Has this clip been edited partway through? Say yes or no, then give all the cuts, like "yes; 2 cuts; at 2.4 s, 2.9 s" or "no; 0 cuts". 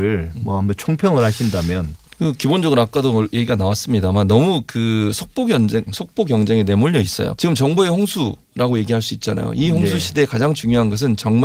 yes; 2 cuts; at 5.9 s, 7.4 s